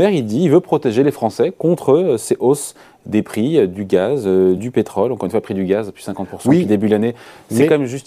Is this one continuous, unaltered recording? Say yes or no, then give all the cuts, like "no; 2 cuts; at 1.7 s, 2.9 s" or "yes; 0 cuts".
yes; 0 cuts